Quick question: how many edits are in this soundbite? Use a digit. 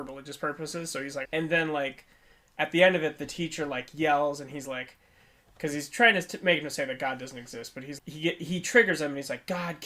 2